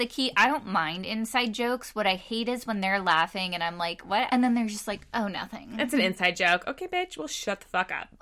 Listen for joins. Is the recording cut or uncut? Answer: cut